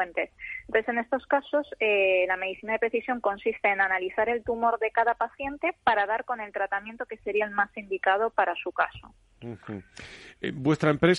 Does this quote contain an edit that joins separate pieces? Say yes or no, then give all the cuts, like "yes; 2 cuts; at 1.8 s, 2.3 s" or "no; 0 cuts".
no; 0 cuts